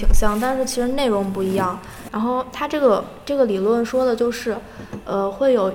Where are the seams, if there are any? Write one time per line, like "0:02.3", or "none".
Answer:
0:02.1